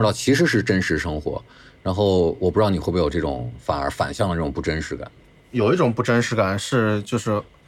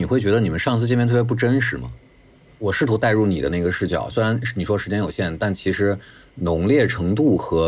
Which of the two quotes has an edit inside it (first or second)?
second